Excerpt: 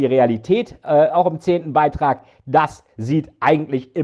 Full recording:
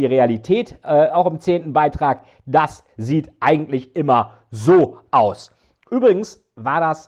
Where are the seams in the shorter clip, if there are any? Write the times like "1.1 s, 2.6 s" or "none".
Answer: none